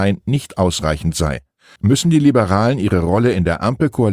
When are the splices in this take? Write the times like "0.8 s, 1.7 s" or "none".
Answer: 1.8 s